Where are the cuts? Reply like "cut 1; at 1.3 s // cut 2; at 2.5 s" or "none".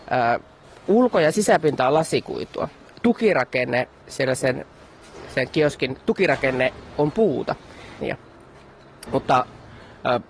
cut 1; at 8.0 s // cut 2; at 9.1 s